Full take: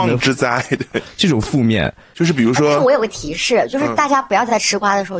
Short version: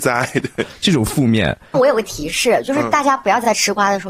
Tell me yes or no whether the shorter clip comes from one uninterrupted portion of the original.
no